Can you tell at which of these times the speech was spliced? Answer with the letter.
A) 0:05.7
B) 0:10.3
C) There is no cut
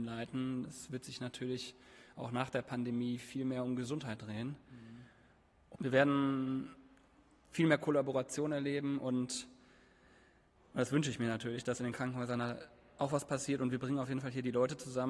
A